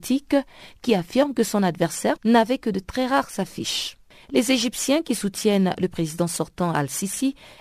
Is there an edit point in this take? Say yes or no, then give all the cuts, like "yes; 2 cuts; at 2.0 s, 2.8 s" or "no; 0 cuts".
yes; 1 cut; at 2.2 s